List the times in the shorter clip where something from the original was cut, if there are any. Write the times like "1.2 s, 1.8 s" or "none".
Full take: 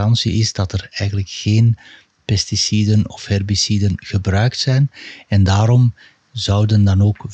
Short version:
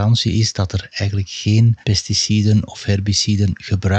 1.8 s

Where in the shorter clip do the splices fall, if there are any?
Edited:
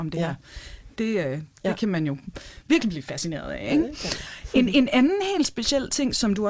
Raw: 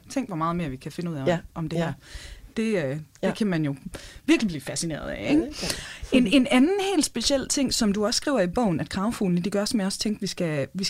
none

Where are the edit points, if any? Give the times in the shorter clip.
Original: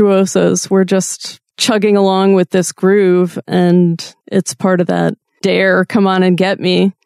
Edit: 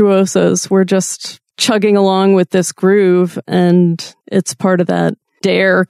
none

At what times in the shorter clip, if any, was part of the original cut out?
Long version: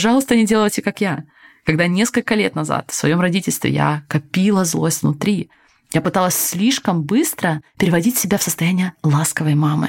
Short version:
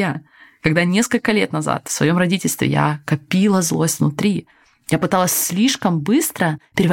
none

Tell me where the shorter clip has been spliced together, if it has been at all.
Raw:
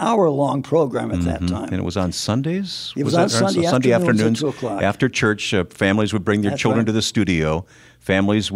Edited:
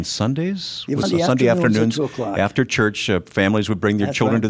1.0 s

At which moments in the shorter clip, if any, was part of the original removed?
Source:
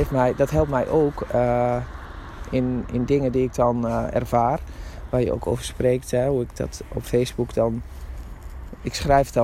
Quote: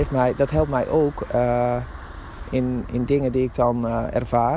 none

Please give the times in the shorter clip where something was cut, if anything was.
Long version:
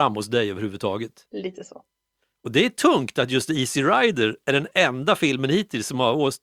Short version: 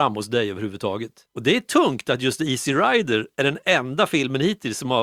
1.3 s

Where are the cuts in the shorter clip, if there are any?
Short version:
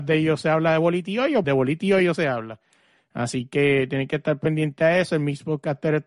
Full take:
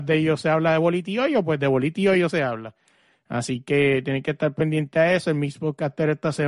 1.4 s

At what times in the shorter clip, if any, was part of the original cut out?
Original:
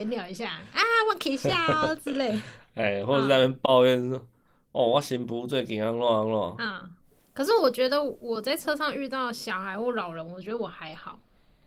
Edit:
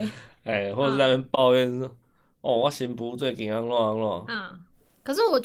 none

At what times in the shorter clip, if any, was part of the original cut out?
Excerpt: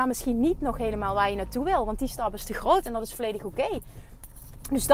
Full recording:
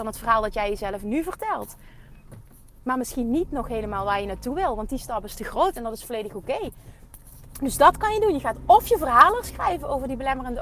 none

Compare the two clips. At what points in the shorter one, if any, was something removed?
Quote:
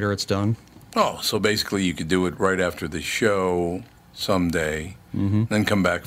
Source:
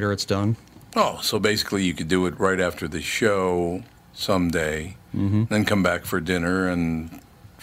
none

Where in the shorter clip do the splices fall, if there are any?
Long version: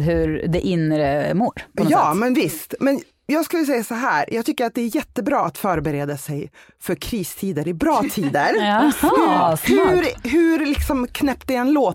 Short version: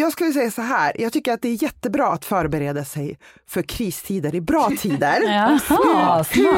none

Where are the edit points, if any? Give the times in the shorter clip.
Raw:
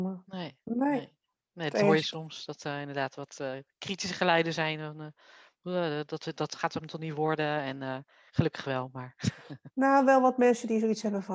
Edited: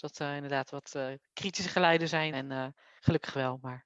2.3 s

